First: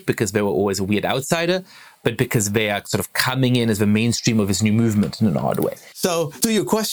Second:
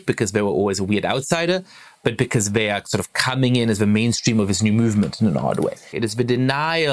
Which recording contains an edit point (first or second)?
second